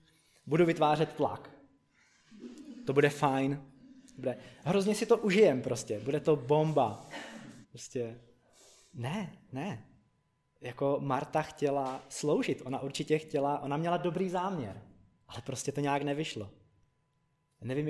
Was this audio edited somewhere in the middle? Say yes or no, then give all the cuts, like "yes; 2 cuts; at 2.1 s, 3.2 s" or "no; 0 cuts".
yes; 1 cut; at 7.6 s